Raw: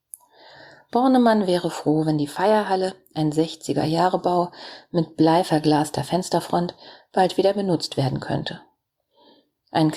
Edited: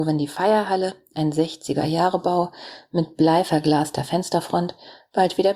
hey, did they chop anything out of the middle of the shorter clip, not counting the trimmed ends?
no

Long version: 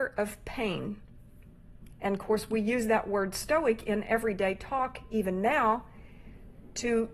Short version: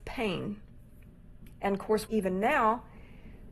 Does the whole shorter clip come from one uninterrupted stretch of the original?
no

